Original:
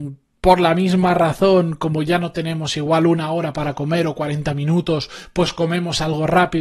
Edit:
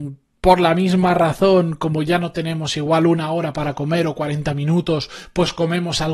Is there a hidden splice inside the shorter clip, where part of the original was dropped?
no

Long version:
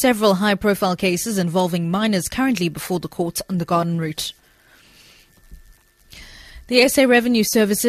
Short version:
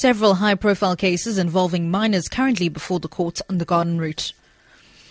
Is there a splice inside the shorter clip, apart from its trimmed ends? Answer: no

